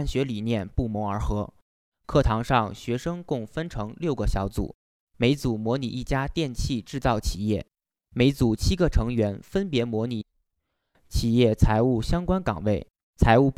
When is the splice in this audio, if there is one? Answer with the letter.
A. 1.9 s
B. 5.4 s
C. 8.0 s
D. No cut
A